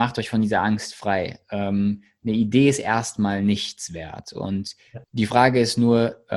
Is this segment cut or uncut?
cut